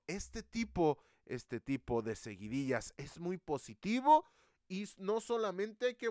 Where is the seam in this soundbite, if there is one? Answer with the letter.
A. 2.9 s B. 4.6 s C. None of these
A